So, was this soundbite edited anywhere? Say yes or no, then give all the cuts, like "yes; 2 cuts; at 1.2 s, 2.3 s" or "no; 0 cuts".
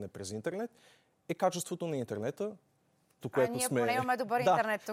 yes; 1 cut; at 3.2 s